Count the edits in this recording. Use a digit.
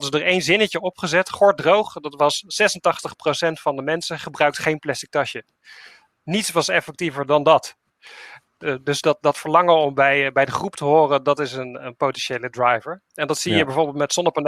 0